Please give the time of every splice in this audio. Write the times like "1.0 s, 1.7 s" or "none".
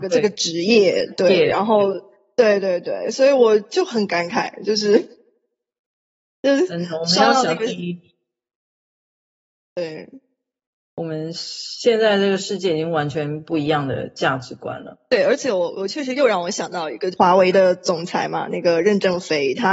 none